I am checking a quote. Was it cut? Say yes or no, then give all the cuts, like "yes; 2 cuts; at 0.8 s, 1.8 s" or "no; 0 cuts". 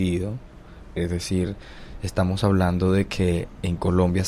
yes; 1 cut; at 1.0 s